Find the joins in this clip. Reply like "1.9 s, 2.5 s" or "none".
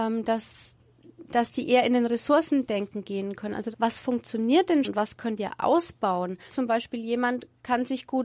3.7 s, 4.8 s, 6.5 s